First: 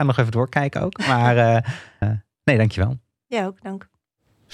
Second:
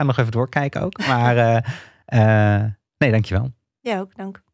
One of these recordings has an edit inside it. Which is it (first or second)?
first